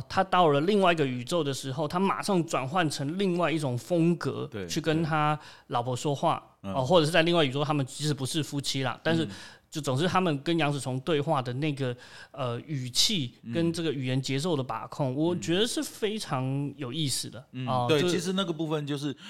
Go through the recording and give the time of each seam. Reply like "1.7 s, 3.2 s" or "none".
none